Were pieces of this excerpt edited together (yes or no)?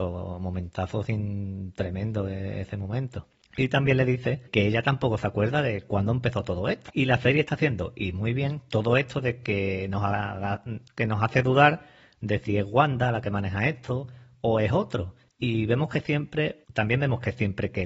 no